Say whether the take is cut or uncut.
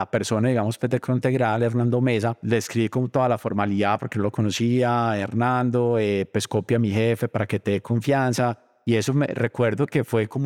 uncut